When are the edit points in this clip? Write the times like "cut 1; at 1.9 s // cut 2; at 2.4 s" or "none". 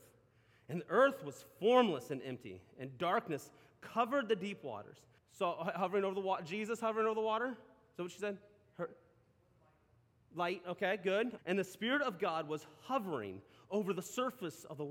cut 1; at 5.2 s // cut 2; at 11.4 s